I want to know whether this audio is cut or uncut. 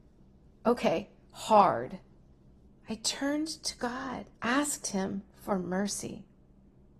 cut